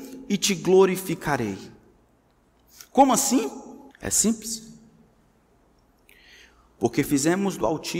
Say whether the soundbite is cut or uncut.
cut